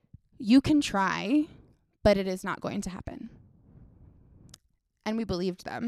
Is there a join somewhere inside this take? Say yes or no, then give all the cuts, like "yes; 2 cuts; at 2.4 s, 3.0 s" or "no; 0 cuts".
no; 0 cuts